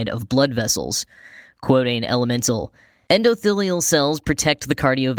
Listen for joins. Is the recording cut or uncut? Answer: uncut